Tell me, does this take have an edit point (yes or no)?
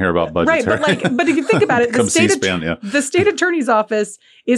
no